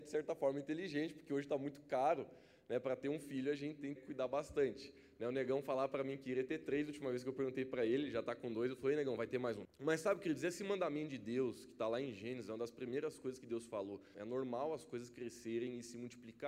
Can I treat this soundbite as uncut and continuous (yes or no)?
no